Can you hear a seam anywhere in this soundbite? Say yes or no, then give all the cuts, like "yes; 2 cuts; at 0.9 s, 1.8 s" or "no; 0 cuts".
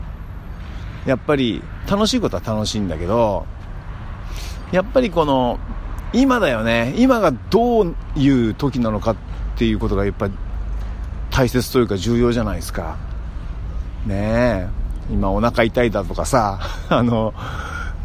no; 0 cuts